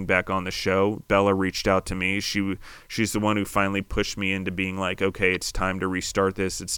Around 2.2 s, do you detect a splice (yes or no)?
no